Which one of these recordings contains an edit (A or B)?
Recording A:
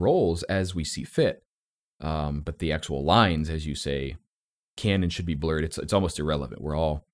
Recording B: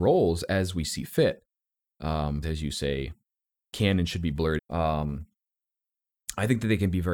B